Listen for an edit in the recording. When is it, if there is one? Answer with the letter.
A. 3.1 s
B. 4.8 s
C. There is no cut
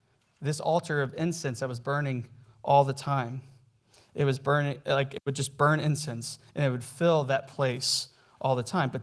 C